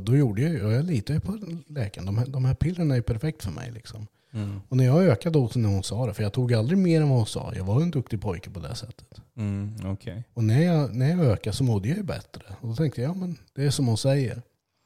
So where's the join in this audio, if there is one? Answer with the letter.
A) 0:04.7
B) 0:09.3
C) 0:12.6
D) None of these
D